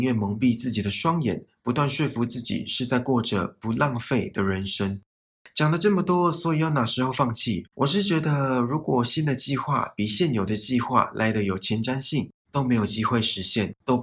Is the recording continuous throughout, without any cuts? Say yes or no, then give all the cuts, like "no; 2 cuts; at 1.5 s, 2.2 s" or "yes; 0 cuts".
no; 2 cuts; at 7.7 s, 12.5 s